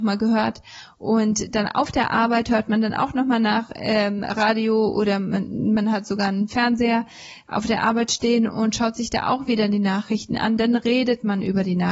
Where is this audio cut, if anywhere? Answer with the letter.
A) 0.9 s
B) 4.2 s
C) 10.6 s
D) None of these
D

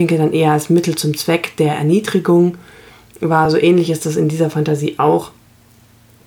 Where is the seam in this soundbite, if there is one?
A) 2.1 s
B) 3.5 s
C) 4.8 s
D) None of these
D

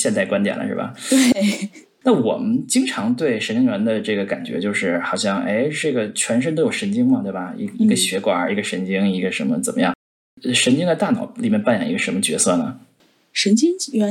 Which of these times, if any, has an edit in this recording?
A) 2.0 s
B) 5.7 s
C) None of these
C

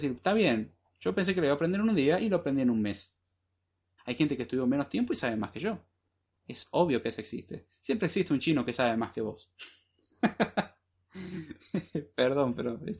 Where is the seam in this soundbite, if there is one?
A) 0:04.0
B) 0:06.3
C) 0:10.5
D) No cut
A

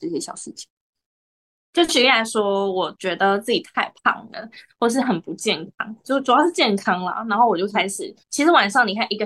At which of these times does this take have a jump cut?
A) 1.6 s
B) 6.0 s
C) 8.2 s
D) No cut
C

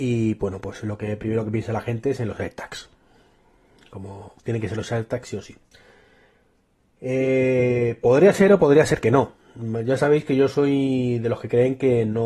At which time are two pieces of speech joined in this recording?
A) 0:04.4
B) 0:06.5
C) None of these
A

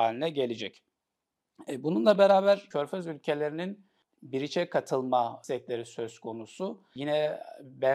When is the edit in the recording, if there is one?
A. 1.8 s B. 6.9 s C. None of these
C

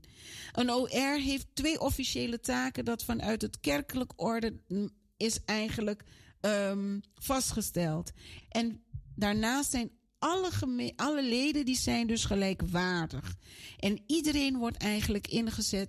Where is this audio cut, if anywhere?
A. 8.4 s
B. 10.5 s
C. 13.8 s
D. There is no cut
A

